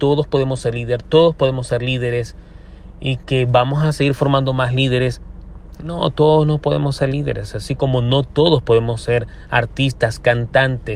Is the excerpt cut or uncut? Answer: uncut